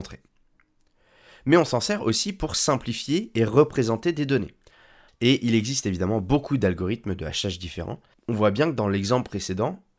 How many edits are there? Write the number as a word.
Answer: two